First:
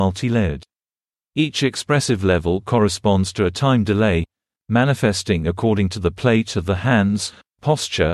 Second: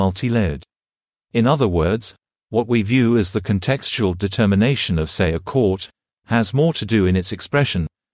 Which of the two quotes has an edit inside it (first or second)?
second